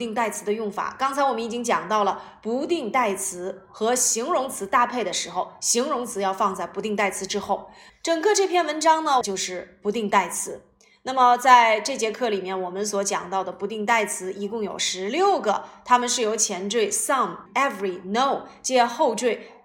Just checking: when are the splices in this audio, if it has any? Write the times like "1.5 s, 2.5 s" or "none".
7.9 s, 9.2 s, 17.5 s